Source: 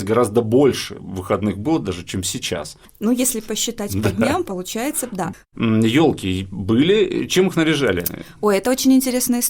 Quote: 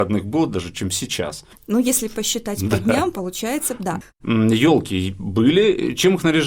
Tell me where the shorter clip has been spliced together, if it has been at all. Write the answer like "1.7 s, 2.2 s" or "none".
none